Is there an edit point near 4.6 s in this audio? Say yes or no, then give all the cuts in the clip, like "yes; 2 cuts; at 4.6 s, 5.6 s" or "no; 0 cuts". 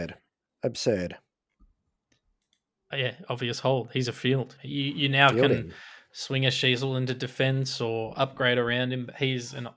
yes; 1 cut; at 4.6 s